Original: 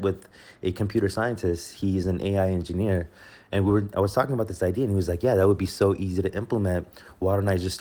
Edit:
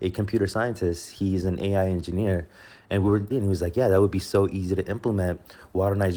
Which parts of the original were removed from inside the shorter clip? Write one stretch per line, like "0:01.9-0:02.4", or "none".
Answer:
0:03.9-0:04.8